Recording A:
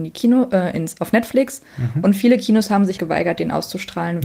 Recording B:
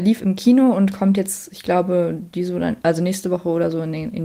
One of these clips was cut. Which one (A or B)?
A